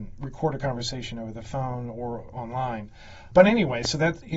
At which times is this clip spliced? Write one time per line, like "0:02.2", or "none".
none